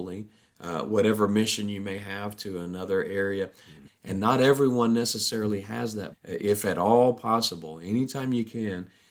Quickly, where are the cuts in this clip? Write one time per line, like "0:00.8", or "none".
0:03.8
0:06.1